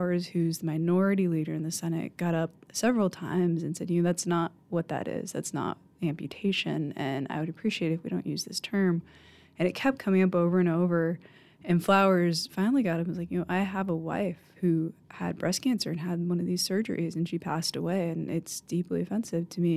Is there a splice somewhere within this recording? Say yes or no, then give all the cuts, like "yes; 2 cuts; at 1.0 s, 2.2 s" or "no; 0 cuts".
no; 0 cuts